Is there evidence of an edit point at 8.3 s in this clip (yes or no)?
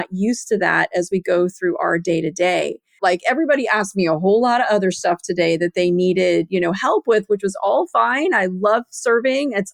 no